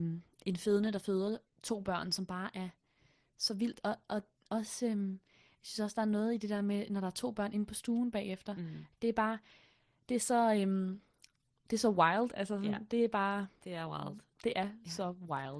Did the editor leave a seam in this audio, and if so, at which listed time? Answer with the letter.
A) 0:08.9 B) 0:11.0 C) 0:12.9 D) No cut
A